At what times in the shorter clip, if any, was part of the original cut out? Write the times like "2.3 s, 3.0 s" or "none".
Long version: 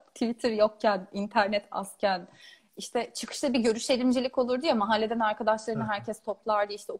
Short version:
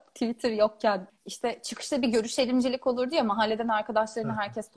1.1 s